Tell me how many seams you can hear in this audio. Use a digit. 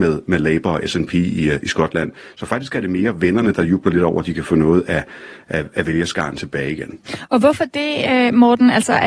0